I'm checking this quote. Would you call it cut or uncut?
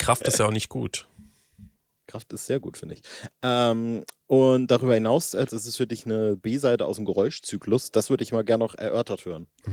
cut